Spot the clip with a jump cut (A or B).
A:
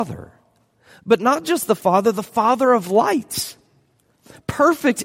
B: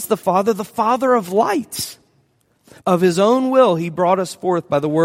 B